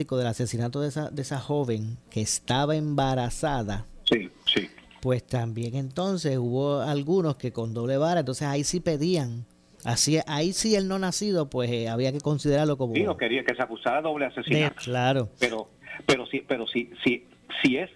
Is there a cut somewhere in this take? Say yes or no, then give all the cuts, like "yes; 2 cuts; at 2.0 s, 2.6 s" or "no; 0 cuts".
yes; 1 cut; at 14.7 s